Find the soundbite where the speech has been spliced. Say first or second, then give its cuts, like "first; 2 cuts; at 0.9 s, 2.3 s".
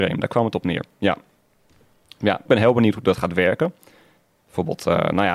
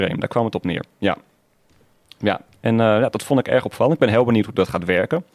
first; 1 cut; at 2.5 s